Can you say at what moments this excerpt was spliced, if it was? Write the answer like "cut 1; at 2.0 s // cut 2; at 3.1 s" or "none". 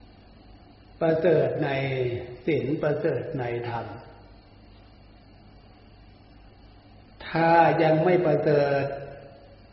none